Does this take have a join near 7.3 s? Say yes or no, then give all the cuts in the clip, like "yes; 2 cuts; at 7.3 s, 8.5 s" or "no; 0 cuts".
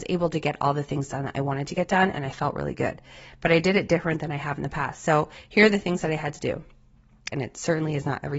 yes; 1 cut; at 7.3 s